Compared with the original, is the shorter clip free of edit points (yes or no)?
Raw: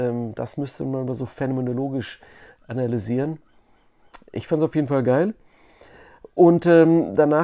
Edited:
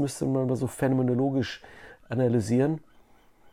yes